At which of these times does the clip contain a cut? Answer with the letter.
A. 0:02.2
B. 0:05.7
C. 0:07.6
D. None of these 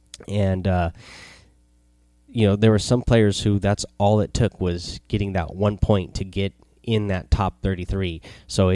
D